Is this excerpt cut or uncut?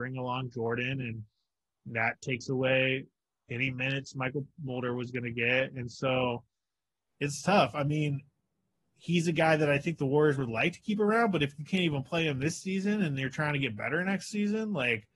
uncut